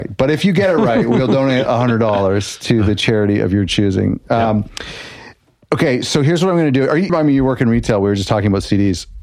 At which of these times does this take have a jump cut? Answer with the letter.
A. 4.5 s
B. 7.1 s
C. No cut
B